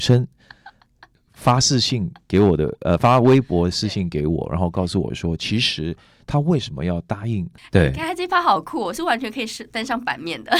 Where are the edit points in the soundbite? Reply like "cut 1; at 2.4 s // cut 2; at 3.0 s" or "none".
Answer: cut 1; at 7.6 s